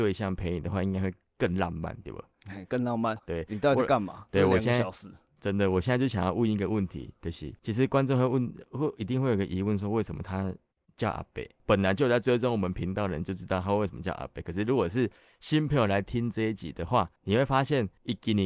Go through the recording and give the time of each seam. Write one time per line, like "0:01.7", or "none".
0:03.2